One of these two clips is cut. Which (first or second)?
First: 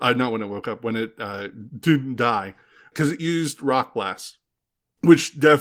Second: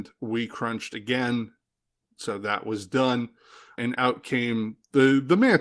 second